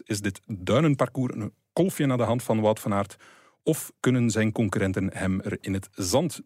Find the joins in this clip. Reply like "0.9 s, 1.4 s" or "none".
none